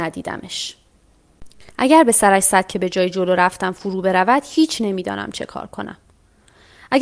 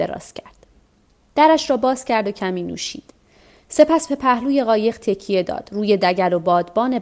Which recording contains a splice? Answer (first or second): first